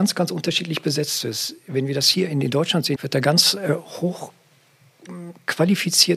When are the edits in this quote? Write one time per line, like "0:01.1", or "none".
0:02.9